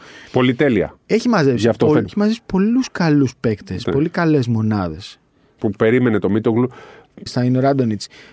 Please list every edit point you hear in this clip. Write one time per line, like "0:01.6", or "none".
0:02.0
0:05.6
0:07.3